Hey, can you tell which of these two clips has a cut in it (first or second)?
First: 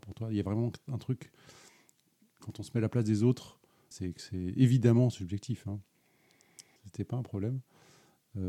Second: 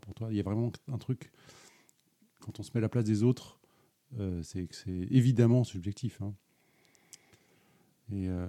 first